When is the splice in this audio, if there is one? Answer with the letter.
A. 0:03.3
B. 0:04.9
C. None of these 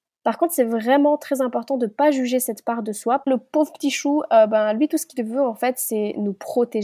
A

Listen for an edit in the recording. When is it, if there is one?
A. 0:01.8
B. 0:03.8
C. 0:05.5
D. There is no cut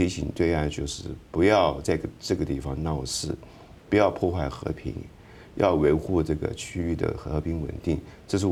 A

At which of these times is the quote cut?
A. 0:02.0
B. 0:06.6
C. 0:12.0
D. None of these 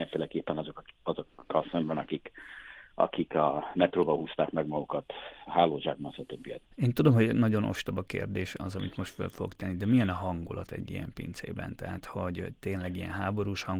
B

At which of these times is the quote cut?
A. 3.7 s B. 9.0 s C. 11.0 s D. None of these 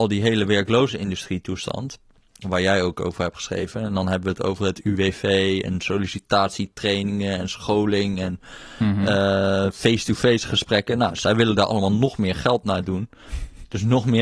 D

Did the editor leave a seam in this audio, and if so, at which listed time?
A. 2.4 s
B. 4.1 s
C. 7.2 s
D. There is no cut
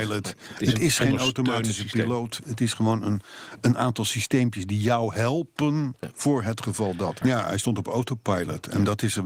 C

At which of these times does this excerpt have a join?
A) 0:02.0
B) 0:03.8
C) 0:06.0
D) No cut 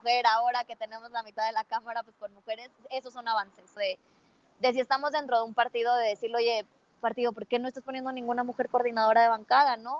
B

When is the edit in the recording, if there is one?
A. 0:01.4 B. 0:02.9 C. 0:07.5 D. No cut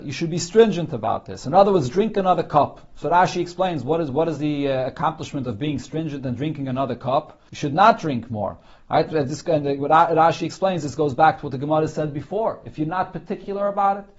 C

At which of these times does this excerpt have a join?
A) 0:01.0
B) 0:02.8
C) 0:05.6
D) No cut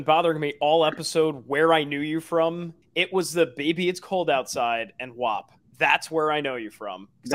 B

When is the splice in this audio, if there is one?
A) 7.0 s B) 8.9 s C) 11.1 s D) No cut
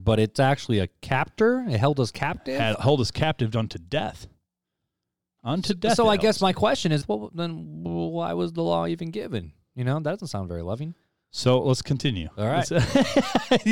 A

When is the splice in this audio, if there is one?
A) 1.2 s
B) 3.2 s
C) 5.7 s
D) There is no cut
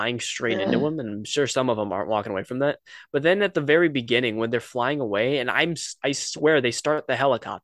D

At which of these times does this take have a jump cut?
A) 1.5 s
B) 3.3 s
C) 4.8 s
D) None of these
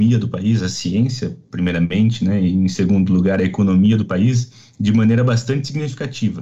D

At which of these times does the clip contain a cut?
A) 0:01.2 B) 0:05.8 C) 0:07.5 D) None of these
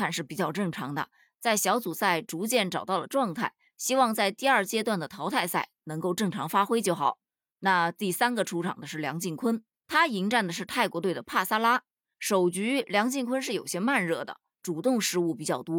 D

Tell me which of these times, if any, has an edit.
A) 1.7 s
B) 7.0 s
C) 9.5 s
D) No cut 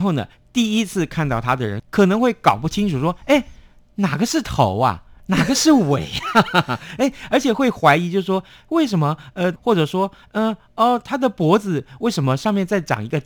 C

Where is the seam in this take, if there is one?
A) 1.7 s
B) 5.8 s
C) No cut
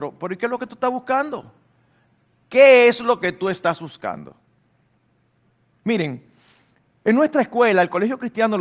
B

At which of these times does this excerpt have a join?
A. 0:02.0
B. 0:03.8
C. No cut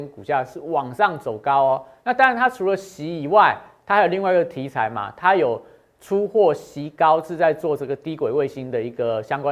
C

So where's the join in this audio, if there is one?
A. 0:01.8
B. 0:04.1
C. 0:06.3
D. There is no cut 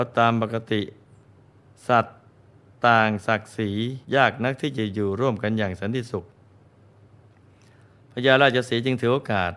B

